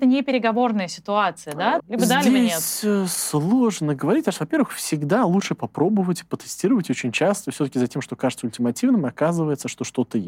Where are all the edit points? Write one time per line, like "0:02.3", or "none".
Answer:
0:01.8